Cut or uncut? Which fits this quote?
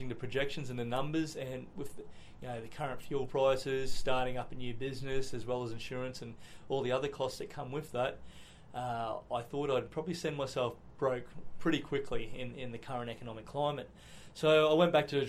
uncut